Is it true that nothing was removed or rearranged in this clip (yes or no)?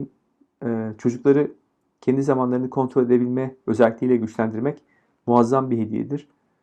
yes